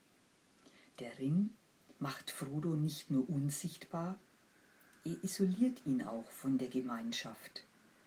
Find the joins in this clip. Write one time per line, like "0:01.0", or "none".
0:02.0